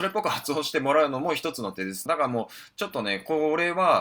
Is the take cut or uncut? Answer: cut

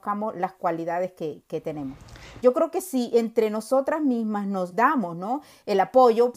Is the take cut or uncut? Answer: cut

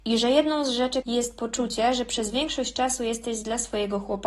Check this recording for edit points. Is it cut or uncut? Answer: cut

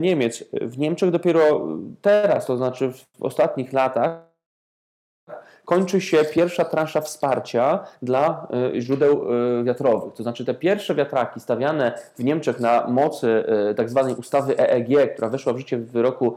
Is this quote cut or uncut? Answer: uncut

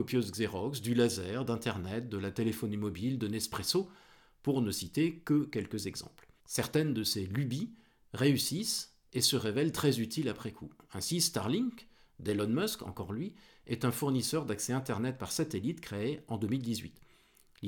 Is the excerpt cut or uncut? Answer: cut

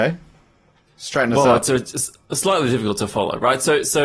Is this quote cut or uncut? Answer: uncut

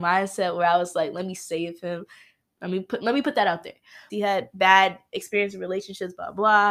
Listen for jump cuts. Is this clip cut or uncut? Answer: cut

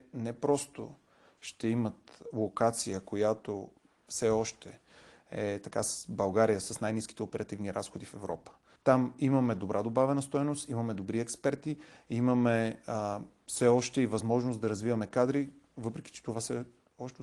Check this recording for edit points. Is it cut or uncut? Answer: cut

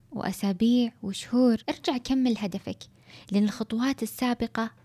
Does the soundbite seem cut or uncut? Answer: cut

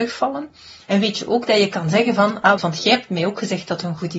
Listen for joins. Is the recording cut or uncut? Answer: cut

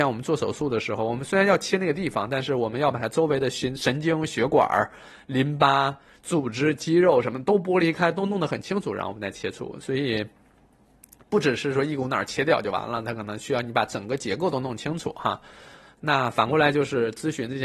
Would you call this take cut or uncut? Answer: uncut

